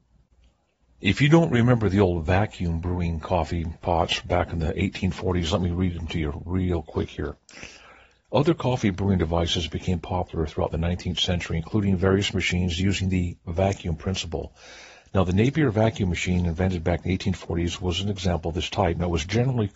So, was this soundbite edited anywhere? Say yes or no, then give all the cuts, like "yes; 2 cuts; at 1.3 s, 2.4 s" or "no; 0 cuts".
no; 0 cuts